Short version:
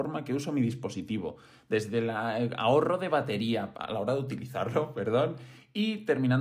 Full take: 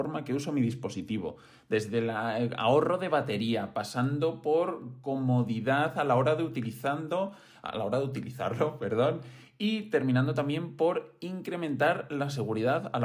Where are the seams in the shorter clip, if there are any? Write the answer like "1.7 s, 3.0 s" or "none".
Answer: 3.7 s